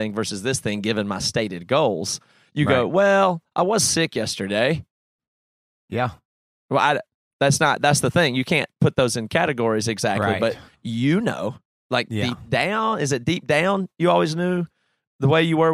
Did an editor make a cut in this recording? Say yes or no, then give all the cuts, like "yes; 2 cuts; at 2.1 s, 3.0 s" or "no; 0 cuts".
yes; 1 cut; at 6.5 s